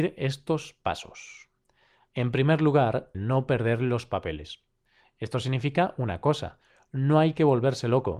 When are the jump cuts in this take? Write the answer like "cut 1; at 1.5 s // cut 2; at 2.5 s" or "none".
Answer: cut 1; at 3.1 s